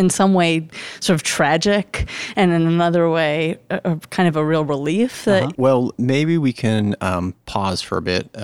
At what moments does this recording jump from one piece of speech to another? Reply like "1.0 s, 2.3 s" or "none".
5.5 s